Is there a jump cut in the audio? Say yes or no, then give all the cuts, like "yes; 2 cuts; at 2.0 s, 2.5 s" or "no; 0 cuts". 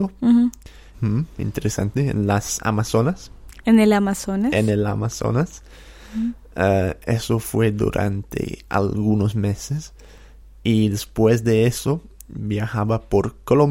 yes; 1 cut; at 0.9 s